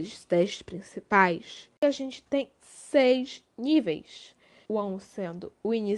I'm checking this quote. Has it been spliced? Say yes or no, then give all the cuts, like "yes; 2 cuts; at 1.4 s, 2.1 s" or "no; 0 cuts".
yes; 1 cut; at 4.6 s